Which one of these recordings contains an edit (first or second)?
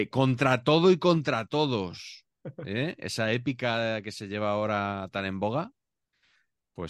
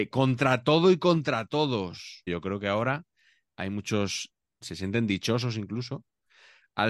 second